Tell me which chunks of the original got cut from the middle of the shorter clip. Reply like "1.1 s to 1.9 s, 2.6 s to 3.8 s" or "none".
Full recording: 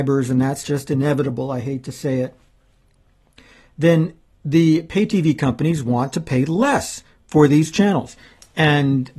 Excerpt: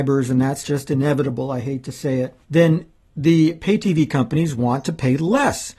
2.4 s to 3.7 s